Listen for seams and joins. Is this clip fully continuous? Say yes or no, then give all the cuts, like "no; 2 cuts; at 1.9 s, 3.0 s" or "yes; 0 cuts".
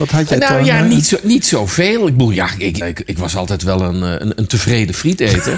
no; 1 cut; at 2.8 s